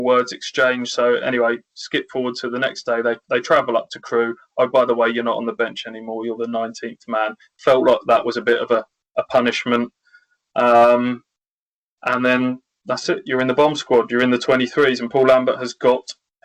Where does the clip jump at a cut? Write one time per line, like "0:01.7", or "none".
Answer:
none